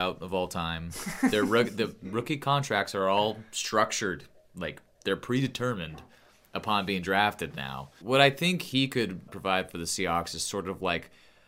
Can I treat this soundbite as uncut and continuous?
no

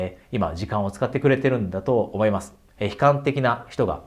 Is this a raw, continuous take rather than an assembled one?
no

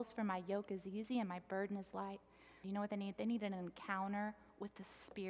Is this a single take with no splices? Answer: no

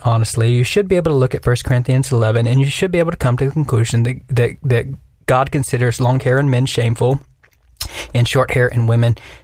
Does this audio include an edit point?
no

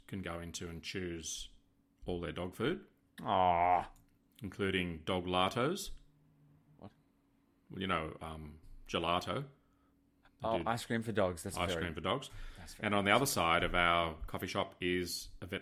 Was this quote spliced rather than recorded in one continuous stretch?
no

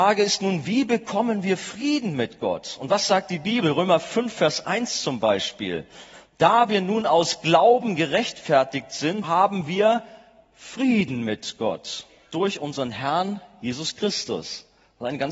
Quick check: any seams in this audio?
yes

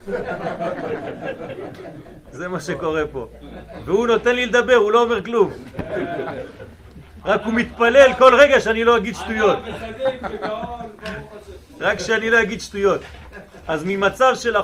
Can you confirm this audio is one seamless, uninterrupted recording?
yes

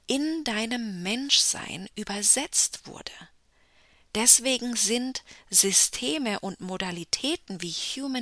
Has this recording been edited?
no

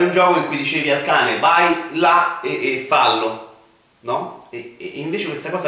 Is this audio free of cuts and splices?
yes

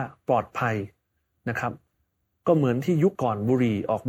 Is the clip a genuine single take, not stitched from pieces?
no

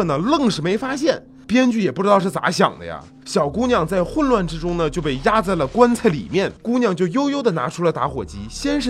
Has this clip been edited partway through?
yes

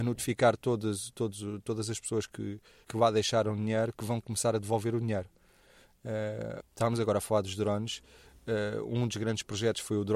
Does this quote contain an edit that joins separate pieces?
yes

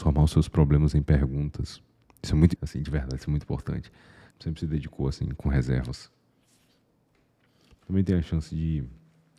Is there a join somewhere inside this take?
yes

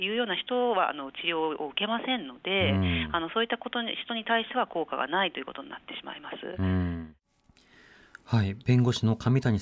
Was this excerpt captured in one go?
yes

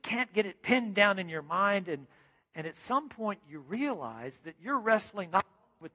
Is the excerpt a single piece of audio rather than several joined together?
yes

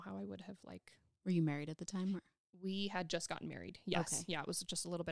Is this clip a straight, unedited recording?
yes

